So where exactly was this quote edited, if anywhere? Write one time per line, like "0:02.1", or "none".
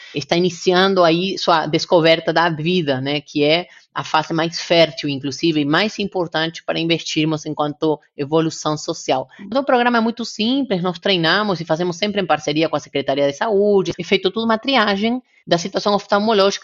0:09.5
0:13.9